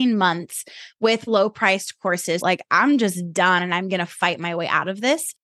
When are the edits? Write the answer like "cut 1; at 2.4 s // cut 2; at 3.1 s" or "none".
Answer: cut 1; at 1.3 s // cut 2; at 2.4 s